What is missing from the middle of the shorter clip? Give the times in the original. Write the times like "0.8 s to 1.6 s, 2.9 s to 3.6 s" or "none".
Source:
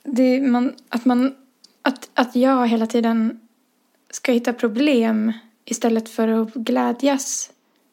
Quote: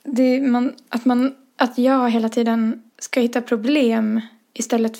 1.6 s to 2.1 s, 3.5 s to 4.0 s

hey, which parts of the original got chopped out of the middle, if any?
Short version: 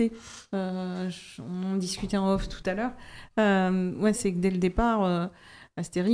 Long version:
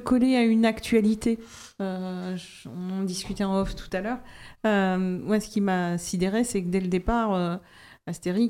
5.4 s to 6.4 s

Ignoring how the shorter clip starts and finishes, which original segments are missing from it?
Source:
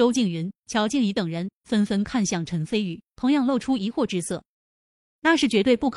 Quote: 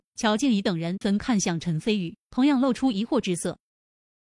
1.5 s to 1.9 s

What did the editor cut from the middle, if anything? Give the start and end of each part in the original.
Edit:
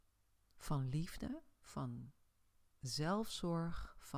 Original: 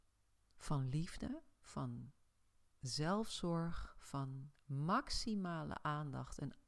none

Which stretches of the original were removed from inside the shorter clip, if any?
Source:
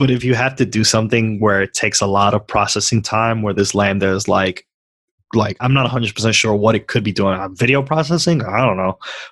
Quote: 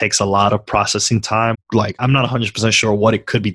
3.3 s to 5.1 s

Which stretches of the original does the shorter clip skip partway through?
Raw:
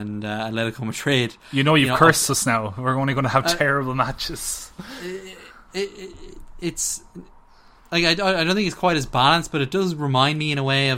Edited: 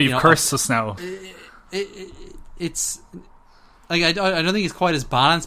2.7 s to 5.0 s

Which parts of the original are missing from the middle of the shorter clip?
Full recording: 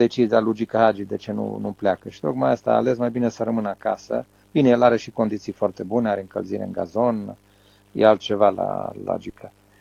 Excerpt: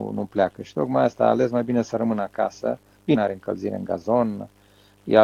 4.6 s to 6.0 s

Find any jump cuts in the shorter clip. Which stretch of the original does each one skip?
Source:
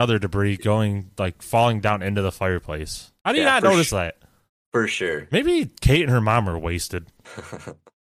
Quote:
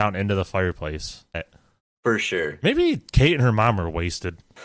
3.2 s to 4.0 s

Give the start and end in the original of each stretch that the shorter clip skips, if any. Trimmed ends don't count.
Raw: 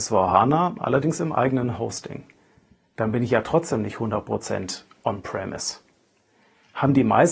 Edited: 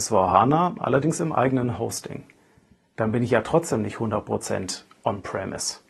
none

